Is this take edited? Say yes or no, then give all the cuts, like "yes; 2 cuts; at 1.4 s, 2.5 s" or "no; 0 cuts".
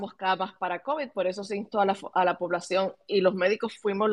no; 0 cuts